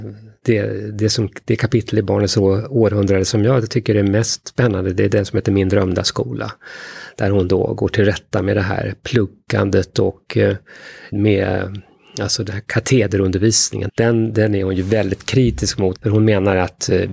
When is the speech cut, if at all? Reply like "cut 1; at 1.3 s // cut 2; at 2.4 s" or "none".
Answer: cut 1; at 11.1 s // cut 2; at 13.9 s // cut 3; at 16.0 s